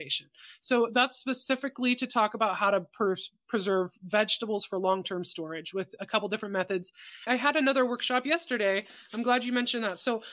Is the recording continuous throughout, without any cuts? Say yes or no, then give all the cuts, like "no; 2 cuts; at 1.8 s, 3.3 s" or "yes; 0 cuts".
no; 1 cut; at 7.3 s